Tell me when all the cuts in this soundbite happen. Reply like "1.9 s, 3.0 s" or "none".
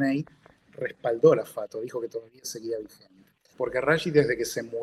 3.5 s